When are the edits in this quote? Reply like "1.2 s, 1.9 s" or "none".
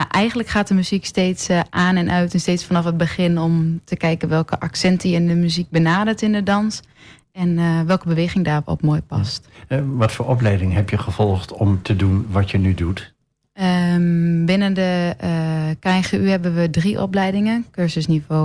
none